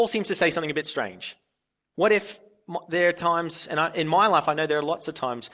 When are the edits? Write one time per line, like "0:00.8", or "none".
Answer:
0:01.9

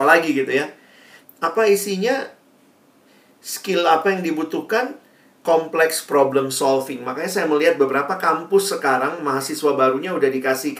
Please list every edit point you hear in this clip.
0:01.2

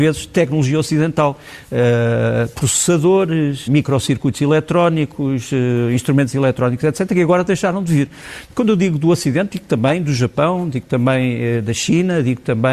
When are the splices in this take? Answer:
0:03.7

